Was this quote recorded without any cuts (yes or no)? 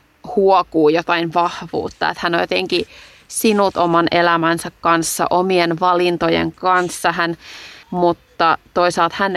no